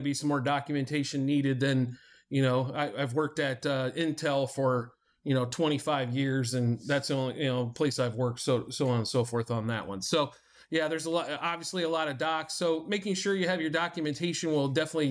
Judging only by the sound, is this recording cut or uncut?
uncut